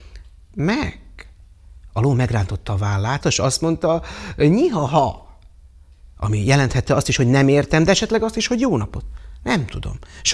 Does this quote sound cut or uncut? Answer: cut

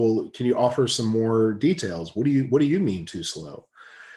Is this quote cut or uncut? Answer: uncut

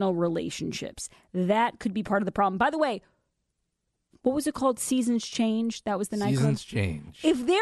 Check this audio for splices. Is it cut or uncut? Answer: uncut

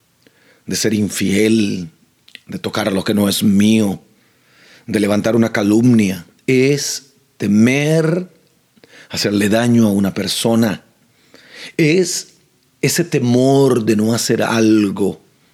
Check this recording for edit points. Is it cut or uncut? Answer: uncut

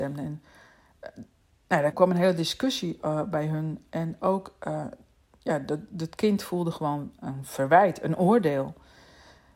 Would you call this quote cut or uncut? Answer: cut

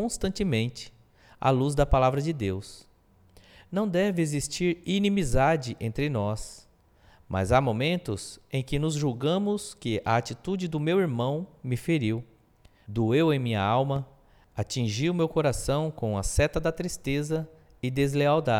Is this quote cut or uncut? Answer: uncut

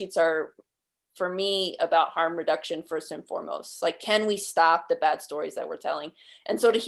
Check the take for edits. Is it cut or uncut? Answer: uncut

